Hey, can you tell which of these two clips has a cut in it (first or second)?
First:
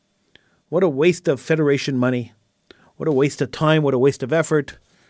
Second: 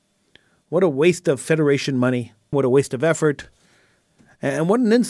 second